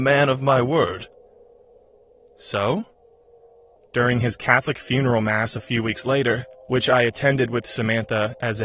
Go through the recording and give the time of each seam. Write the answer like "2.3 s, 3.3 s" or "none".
3.8 s, 6.6 s